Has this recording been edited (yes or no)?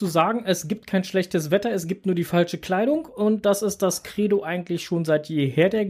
no